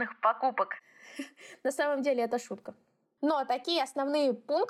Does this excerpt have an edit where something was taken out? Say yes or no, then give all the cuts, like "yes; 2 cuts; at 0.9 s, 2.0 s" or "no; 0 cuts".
no; 0 cuts